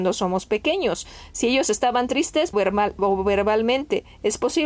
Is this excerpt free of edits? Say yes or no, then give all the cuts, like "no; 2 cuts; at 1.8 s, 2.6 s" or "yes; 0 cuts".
no; 1 cut; at 2.5 s